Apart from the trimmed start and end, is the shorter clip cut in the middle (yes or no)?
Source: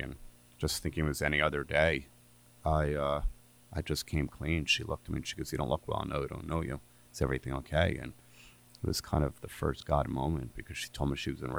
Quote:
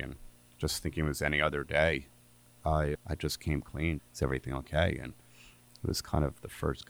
yes